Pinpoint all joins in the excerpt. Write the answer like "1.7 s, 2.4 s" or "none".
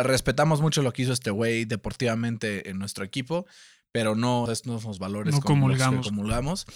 4.5 s